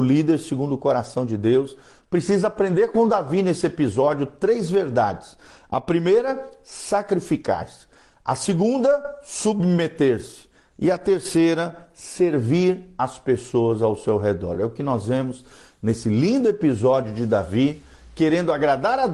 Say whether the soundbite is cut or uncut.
uncut